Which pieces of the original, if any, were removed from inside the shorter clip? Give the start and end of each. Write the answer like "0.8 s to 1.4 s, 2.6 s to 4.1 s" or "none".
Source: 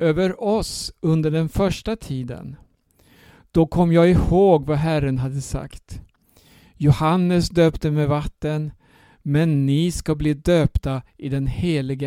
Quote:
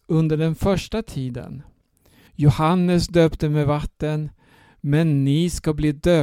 3.2 s to 6.7 s

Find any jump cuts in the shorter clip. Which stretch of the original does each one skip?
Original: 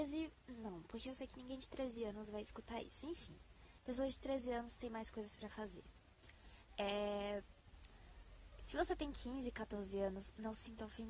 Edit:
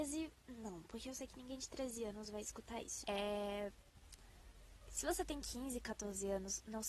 3.0 s to 6.7 s

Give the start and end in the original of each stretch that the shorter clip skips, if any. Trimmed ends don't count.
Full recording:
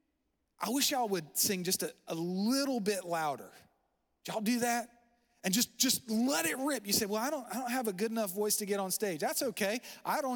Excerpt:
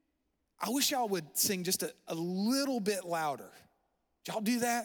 none

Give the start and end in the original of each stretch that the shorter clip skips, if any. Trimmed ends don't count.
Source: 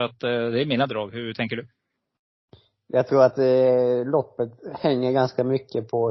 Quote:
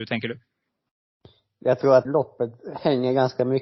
3.3 s to 4.0 s

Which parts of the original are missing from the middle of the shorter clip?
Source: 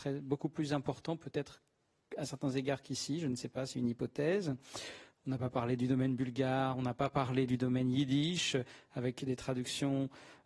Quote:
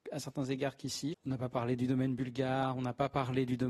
3.2 s to 5.1 s

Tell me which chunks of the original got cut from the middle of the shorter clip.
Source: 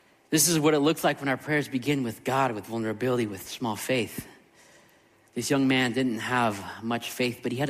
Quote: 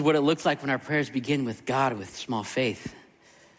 2.5 s to 3.3 s

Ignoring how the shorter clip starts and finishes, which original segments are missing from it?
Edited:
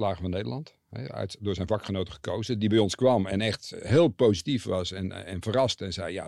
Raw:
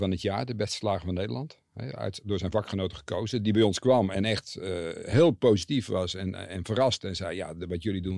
4.6 s to 4.9 s

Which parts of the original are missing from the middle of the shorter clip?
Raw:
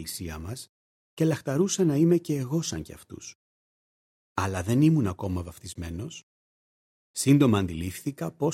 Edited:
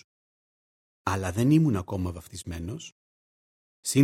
none

